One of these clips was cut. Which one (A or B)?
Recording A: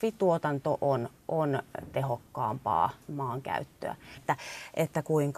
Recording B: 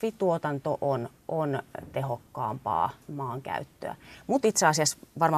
A